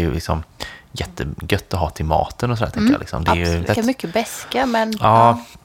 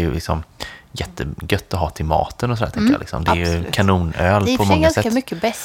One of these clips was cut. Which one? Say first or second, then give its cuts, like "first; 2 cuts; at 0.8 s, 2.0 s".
first; 1 cut; at 3.7 s